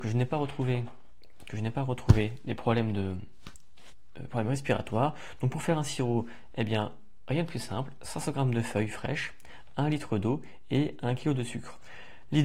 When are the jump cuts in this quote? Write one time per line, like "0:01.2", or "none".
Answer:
none